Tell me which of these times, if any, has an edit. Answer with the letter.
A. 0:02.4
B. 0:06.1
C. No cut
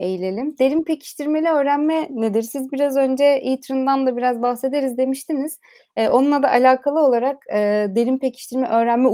C